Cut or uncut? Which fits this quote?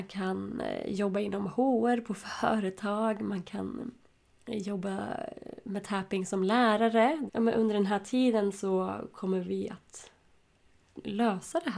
cut